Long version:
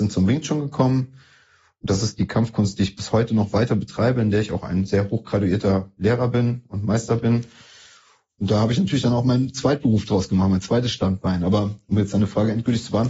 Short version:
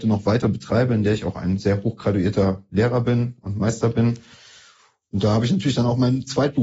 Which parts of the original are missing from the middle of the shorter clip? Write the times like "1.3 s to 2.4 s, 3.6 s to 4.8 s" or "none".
none